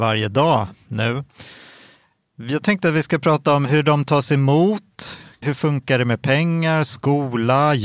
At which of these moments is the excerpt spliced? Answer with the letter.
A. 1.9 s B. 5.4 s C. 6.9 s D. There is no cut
B